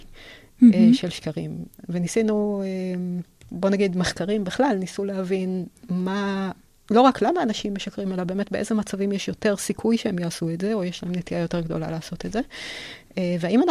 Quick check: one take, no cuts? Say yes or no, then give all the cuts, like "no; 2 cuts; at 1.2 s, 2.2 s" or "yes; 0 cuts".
yes; 0 cuts